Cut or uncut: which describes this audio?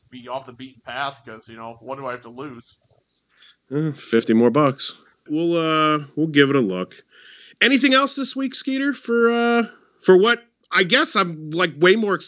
cut